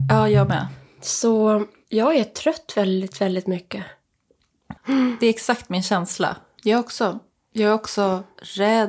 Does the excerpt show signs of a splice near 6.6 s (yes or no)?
yes